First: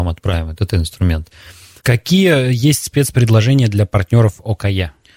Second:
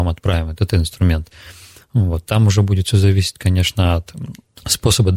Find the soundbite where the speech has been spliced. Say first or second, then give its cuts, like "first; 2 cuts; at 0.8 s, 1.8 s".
first; 1 cut; at 1.8 s